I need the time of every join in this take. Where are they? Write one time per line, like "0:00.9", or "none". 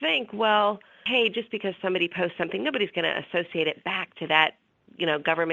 none